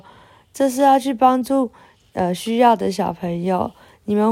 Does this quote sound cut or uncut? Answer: uncut